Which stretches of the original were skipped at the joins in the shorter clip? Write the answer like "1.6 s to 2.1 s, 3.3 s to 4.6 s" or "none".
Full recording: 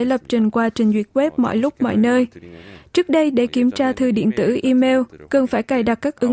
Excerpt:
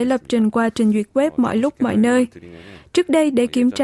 none